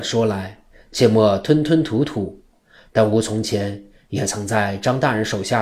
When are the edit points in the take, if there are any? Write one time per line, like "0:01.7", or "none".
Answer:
0:02.5